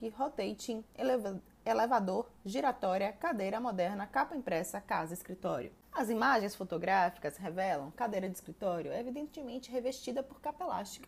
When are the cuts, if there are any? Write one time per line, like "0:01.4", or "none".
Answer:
0:05.8